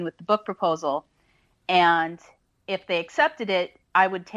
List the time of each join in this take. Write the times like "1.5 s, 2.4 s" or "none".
none